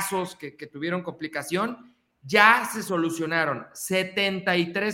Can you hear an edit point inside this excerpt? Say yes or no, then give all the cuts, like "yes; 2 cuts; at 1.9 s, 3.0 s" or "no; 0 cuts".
no; 0 cuts